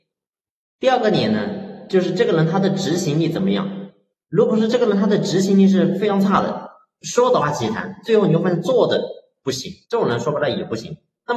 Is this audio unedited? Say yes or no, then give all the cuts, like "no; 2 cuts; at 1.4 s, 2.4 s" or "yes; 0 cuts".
no; 2 cuts; at 7.4 s, 9.8 s